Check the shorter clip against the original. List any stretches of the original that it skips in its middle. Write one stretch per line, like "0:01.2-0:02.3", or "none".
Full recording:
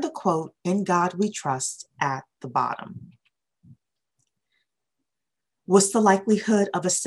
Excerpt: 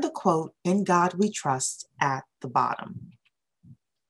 none